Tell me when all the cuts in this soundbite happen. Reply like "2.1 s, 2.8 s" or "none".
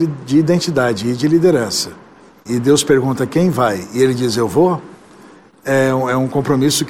2.5 s